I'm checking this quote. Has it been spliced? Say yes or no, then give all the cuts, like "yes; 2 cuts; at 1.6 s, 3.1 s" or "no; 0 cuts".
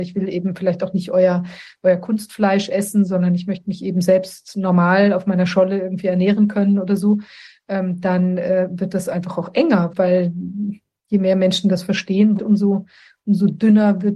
yes; 2 cuts; at 9.9 s, 12.4 s